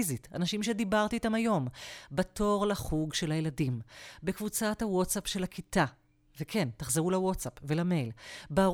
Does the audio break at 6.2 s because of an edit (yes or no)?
no